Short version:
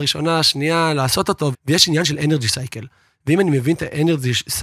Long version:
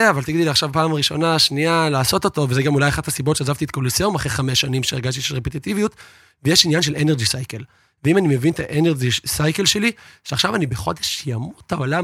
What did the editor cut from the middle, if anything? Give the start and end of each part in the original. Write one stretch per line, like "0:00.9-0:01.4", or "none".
0:02.5-0:06.3